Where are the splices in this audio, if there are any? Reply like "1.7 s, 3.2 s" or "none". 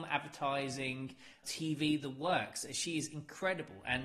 1.4 s